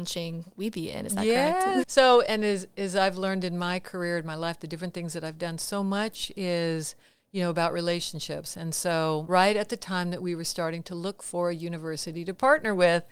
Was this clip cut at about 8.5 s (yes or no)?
no